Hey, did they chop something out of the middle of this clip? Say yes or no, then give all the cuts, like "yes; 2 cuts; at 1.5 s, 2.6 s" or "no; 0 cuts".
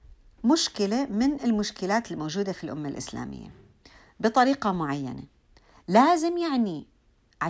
no; 0 cuts